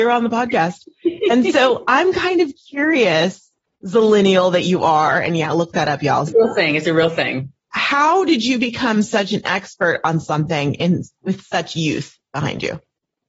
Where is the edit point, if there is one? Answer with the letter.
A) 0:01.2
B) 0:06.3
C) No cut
B